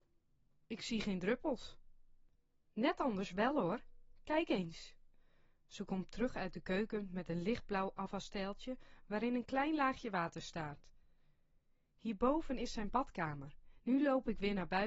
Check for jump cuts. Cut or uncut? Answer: cut